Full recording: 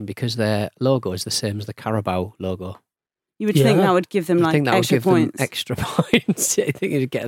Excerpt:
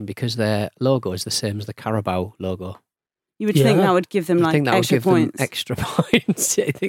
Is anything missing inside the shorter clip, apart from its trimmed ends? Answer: no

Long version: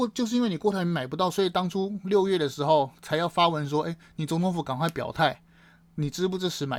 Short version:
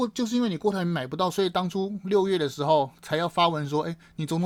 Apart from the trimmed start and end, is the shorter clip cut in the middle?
no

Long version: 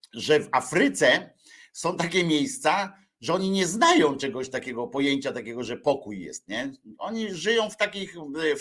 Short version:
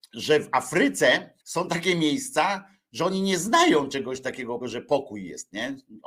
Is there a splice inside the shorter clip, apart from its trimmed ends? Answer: yes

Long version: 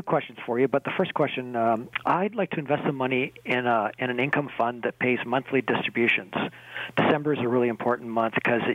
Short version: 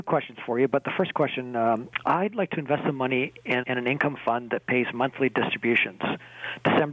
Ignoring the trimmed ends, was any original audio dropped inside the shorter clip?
yes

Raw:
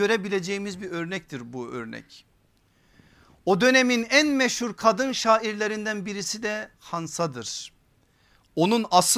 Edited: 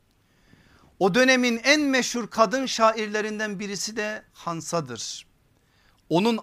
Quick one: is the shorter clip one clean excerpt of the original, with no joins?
yes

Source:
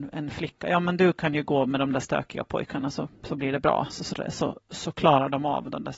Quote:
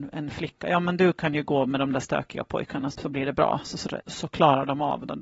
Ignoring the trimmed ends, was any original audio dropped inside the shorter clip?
yes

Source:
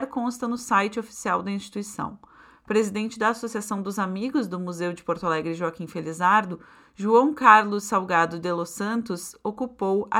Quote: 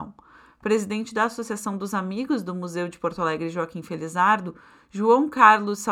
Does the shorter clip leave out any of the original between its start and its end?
no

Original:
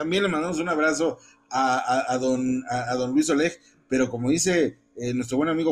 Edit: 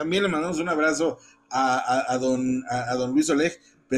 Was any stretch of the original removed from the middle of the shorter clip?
no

